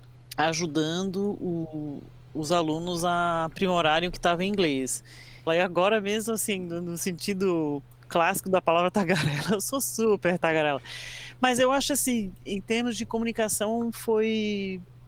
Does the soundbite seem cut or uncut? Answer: cut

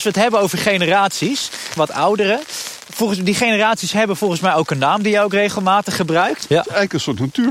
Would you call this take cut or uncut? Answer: cut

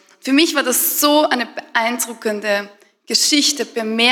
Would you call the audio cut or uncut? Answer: uncut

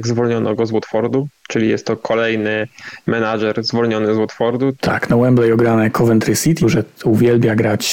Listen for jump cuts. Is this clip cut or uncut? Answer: cut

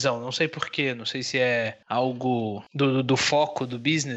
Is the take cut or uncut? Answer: uncut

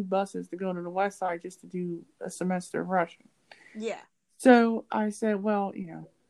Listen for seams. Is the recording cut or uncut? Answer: uncut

